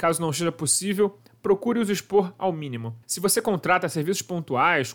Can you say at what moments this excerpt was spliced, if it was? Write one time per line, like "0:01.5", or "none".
0:03.0

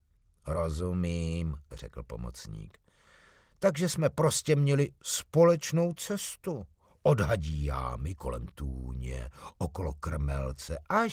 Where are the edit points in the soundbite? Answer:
none

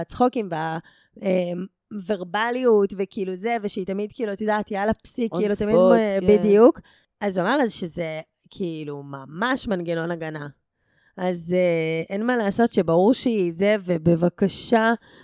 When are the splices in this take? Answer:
none

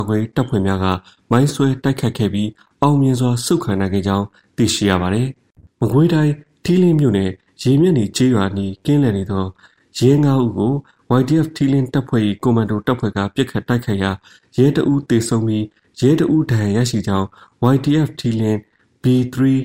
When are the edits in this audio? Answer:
none

